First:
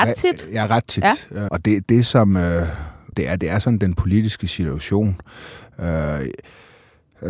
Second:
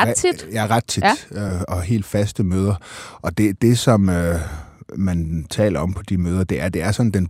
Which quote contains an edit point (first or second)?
first